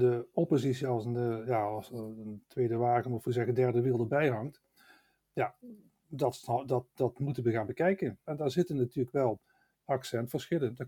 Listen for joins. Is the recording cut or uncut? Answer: cut